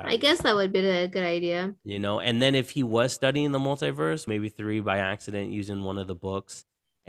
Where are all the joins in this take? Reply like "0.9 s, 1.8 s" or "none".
4.3 s

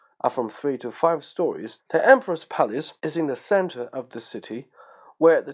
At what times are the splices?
1.8 s, 3.0 s

